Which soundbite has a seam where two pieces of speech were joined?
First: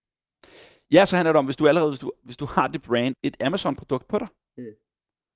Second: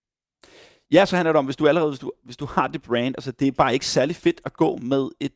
first; 1 cut; at 3.1 s

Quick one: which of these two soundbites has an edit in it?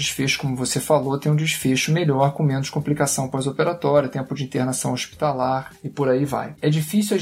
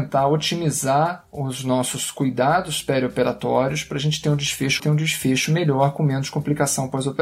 second; 1 cut; at 4.8 s

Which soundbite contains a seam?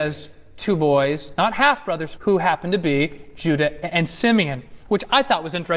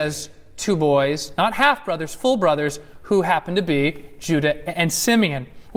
first; 1 cut; at 2.2 s

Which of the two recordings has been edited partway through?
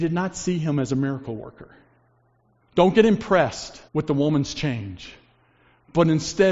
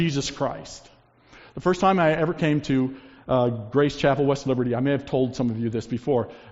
first; 2 cuts; at 2.6 s, 3.9 s

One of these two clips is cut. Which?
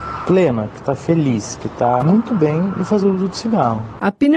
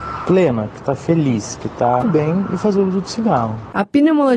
second; 1 cut; at 2.0 s

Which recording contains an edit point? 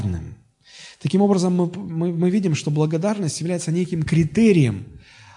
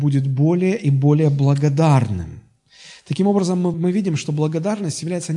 second; 1 cut; at 3.7 s

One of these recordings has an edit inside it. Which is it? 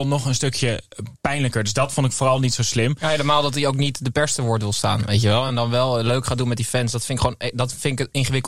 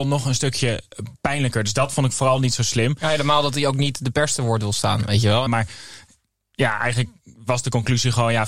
second; 1 cut; at 5.5 s

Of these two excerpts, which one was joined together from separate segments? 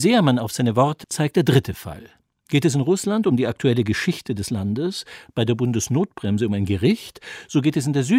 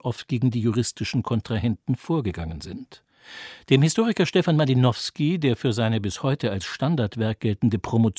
first; 1 cut; at 1.0 s

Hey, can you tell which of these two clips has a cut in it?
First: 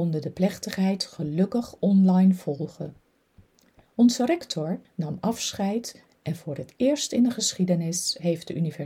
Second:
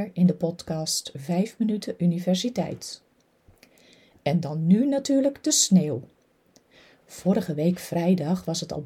first; 1 cut; at 4.8 s

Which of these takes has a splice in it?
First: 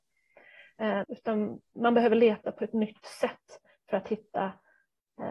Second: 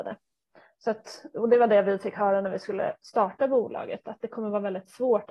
first; 1 cut; at 1.0 s

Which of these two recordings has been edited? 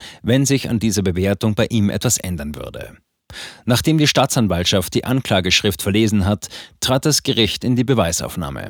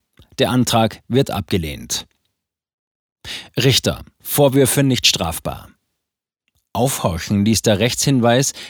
second; 1 cut; at 4.1 s

